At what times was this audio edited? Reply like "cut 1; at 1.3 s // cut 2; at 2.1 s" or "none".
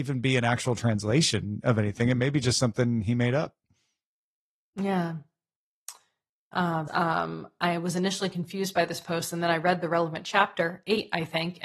cut 1; at 6.9 s